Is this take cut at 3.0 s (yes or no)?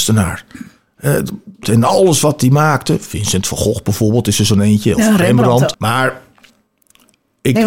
no